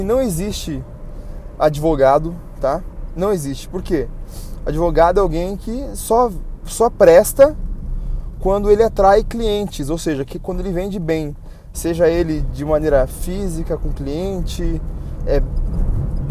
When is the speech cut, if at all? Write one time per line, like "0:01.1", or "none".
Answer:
0:11.7
0:15.2